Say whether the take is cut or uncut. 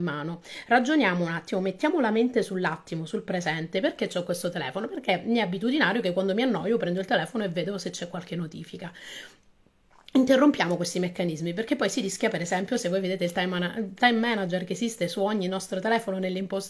uncut